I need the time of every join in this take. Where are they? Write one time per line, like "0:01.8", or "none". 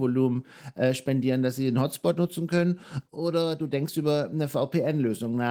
none